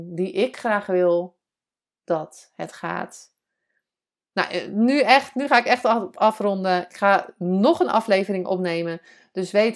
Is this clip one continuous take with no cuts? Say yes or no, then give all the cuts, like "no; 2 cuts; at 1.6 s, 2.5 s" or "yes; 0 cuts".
yes; 0 cuts